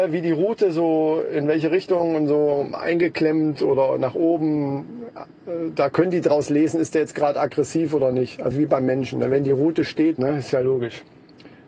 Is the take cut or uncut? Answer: cut